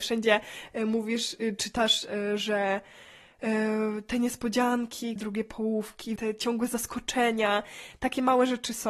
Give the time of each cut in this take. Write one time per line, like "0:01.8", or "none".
0:05.2
0:06.2